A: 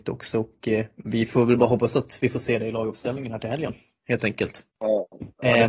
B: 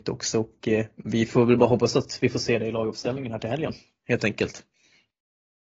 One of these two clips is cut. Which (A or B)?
A